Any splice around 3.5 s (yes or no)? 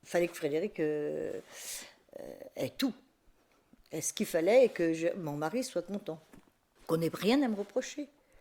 no